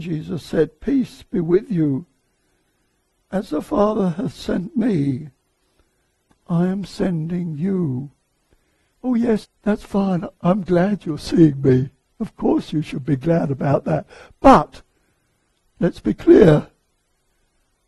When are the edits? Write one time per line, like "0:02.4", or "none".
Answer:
0:09.4